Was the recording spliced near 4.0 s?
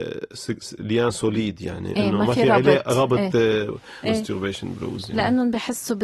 yes; 1 cut; at 4.0 s

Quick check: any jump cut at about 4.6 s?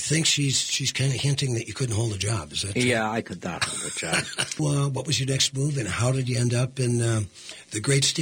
yes; 1 cut; at 4.6 s

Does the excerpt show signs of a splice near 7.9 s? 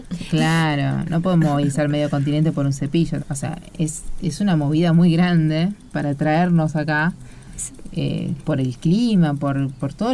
no; 1 cut; at 3.2 s

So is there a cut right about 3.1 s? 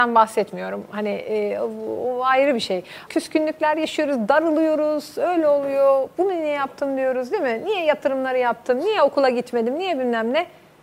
yes; 1 cut; at 3.1 s

